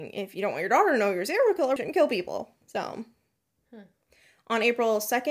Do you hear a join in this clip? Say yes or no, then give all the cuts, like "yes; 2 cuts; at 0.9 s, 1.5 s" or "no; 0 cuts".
yes; 1 cut; at 1.8 s